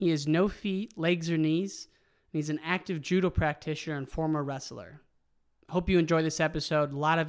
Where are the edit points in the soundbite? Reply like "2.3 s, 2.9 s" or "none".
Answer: none